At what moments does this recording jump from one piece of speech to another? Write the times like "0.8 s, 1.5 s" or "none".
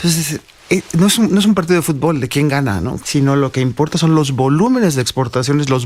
3.0 s